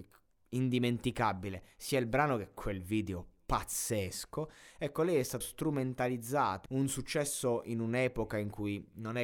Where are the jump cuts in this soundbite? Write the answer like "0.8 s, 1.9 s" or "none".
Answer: 5.4 s, 6.7 s